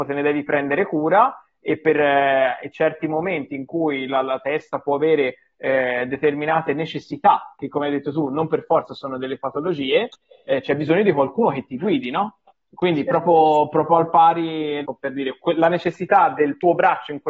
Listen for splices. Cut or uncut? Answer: cut